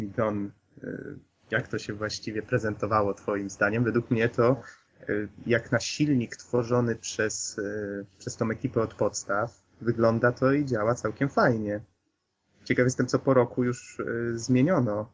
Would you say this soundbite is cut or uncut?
uncut